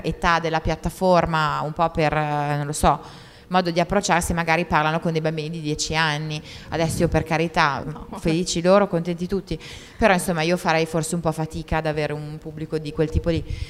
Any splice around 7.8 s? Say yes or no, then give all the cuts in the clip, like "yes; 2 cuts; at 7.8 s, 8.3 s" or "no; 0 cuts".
yes; 1 cut; at 7.8 s